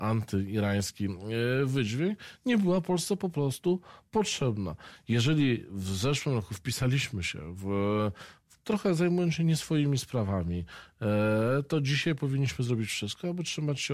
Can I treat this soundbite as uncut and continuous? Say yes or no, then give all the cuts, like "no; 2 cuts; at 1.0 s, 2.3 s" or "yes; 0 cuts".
yes; 0 cuts